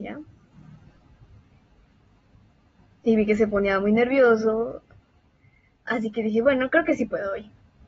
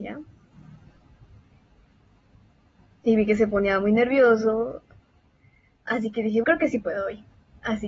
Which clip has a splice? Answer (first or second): second